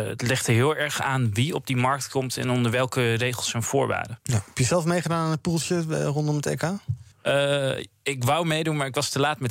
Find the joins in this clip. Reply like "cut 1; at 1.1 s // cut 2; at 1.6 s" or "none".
cut 1; at 7.1 s